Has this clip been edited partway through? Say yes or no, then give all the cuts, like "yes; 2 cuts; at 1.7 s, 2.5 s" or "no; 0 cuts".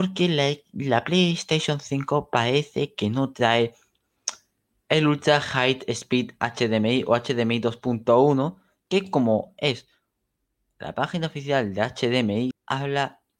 yes; 1 cut; at 12.5 s